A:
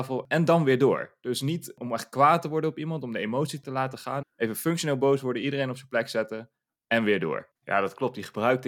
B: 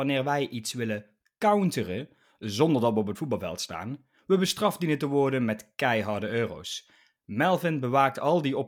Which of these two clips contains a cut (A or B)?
A